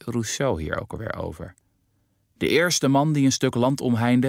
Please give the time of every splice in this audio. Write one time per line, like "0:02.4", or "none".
none

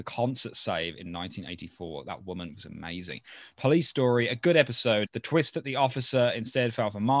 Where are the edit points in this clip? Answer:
0:05.0

